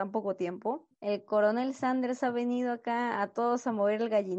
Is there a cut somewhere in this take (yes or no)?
yes